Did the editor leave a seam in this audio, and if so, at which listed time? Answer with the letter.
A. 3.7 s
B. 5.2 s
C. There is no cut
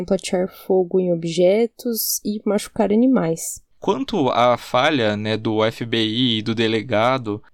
A